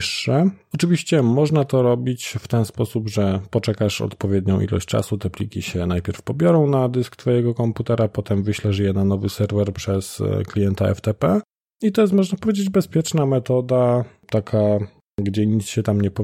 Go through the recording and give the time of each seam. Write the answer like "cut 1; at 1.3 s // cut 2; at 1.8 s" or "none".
none